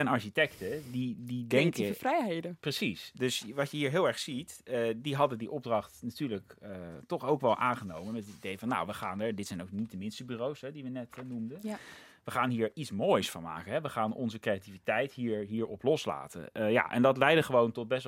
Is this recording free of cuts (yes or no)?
yes